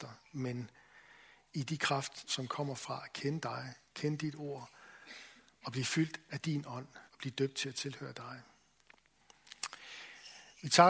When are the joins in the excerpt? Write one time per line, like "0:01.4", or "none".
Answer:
0:02.3
0:07.1